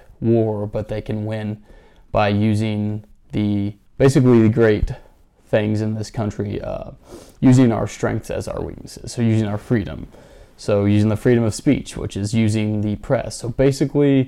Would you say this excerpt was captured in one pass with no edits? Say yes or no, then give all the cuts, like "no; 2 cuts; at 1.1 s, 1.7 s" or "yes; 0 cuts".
no; 1 cut; at 3.8 s